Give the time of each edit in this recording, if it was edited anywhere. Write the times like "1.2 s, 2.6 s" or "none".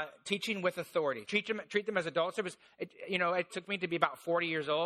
1.2 s, 3.5 s